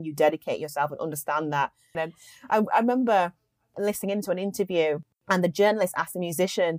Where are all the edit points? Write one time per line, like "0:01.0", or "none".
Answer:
0:01.9